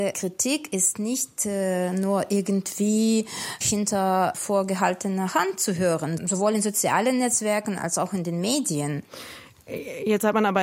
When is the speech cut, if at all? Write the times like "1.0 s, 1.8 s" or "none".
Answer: 3.6 s, 6.2 s